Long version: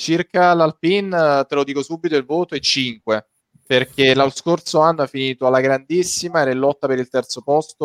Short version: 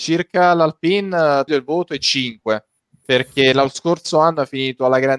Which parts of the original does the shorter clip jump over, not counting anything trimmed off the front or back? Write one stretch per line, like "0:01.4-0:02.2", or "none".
0:01.5-0:02.1